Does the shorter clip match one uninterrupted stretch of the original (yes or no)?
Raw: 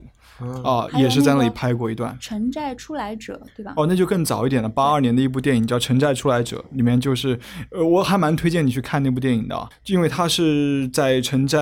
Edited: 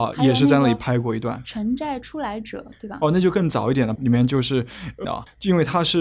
no